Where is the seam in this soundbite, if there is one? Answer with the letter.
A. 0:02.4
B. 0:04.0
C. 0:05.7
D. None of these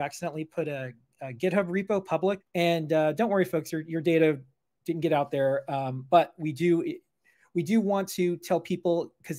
A